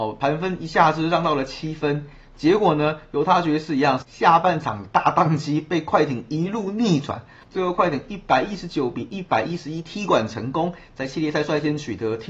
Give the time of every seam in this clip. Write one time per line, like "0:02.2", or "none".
0:04.0